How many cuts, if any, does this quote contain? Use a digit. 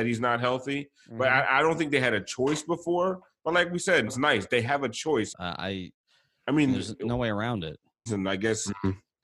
3